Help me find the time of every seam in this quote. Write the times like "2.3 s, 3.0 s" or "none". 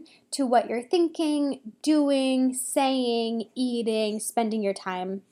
none